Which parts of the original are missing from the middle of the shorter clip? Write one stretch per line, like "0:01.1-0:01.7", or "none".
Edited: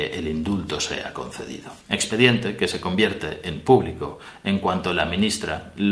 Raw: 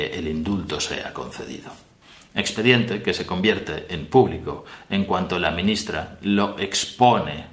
0:01.8-0:02.3